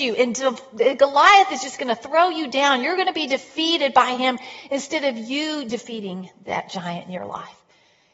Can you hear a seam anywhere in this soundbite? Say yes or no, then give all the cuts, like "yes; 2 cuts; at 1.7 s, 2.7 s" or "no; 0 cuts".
no; 0 cuts